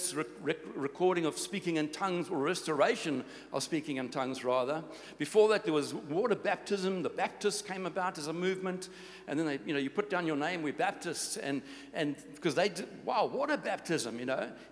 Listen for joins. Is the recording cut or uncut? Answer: uncut